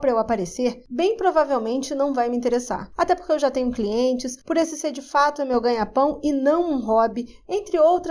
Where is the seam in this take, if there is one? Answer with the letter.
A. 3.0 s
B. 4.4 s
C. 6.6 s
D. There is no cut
D